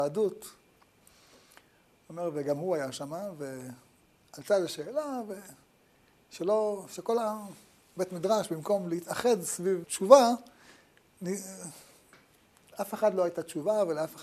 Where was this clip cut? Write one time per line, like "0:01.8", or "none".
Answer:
0:09.8